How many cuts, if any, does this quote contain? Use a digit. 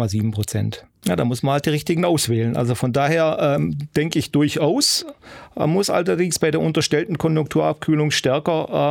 1